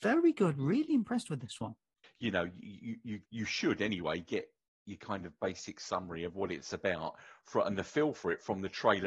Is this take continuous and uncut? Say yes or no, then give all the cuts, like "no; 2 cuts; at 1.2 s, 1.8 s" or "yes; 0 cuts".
no; 2 cuts; at 2.0 s, 3.3 s